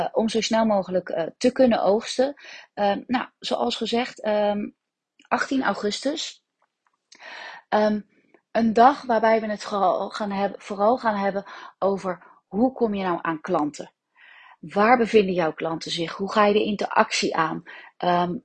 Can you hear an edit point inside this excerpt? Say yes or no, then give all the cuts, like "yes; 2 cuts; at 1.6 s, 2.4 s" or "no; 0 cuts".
no; 0 cuts